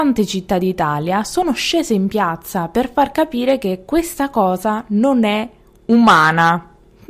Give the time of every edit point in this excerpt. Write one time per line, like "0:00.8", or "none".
none